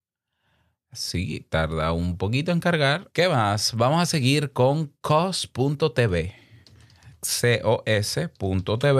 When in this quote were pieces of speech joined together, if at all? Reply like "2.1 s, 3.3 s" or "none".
3.1 s

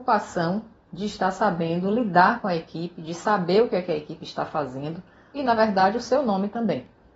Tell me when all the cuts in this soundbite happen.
5.3 s

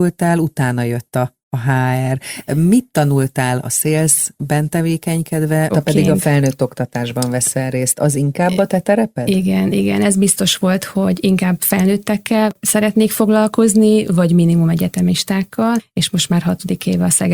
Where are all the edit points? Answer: 5.7 s

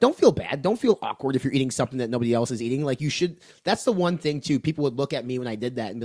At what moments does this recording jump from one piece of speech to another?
none

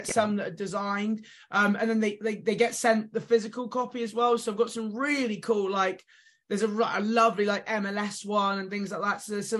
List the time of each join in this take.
none

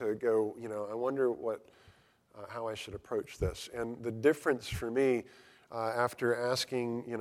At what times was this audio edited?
none

